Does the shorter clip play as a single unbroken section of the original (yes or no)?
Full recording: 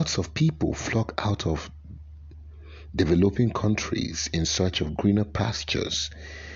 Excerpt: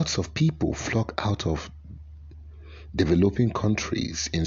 yes